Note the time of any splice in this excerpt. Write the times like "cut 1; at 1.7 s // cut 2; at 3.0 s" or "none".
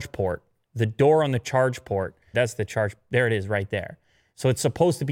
cut 1; at 2.3 s